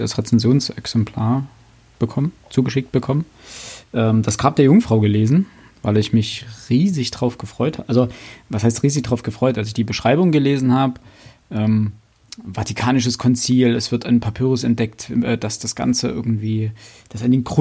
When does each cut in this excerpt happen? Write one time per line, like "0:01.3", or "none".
none